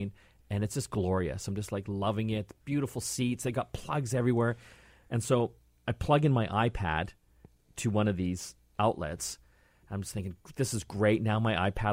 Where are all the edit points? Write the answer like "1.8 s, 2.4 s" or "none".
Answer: none